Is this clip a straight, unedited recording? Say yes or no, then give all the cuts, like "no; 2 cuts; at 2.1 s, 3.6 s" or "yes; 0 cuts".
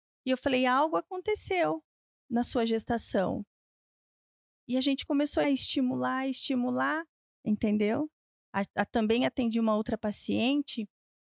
no; 2 cuts; at 5.4 s, 7.3 s